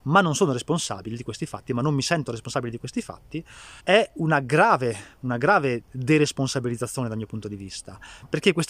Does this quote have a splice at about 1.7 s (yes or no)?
no